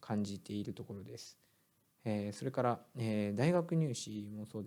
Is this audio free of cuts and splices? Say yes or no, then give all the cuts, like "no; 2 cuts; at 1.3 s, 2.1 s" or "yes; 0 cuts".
yes; 0 cuts